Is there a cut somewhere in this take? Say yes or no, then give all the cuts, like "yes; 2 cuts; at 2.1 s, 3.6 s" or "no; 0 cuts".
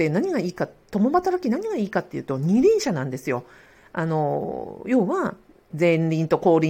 yes; 1 cut; at 5.7 s